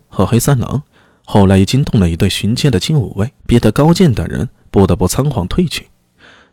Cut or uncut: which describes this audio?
cut